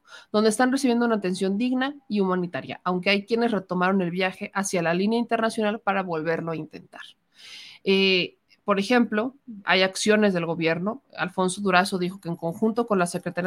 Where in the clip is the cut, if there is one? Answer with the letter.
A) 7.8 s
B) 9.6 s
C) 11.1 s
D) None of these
B